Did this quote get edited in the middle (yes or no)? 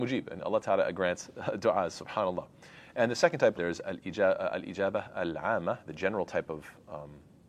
yes